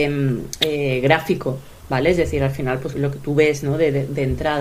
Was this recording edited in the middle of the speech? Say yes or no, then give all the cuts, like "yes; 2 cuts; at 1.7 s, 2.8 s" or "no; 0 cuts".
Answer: yes; 1 cut; at 2.9 s